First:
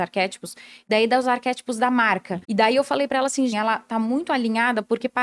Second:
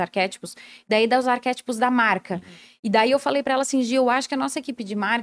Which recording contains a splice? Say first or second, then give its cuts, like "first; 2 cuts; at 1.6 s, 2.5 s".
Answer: first; 2 cuts; at 2.4 s, 3.5 s